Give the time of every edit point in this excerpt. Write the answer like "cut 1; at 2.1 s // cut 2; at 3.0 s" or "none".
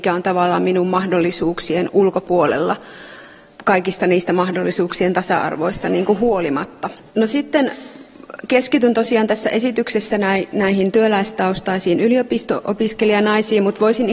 cut 1; at 7.0 s